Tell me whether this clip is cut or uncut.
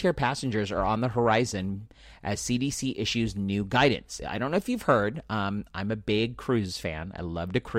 uncut